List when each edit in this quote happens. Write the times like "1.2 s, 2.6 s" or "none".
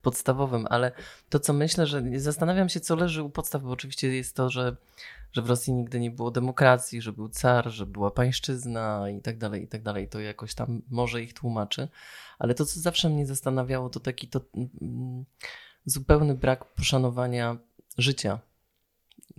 none